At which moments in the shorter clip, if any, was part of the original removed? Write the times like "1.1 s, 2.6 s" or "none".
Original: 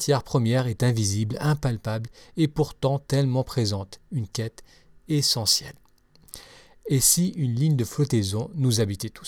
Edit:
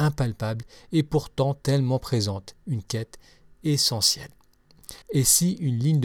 5.0 s